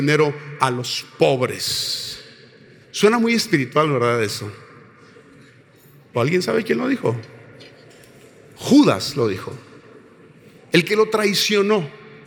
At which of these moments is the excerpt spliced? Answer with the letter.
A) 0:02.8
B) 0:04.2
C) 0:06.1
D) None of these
C